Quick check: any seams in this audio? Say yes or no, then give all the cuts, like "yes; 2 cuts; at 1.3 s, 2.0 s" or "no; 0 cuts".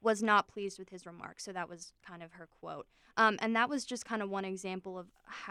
no; 0 cuts